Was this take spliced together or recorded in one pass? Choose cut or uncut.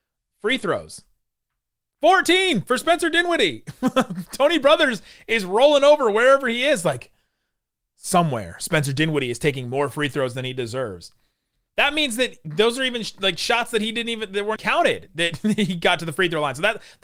cut